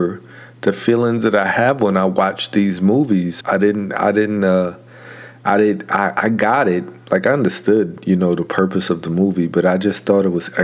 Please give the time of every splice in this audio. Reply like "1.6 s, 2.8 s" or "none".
3.4 s